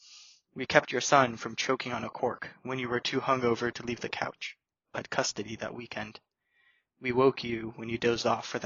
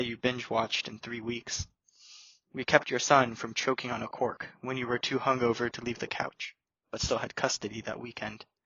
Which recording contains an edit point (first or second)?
first